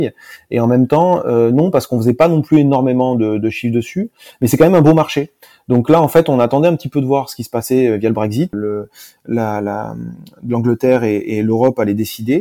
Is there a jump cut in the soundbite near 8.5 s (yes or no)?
yes